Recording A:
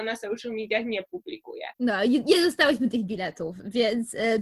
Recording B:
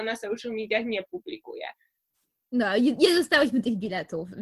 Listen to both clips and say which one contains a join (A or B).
A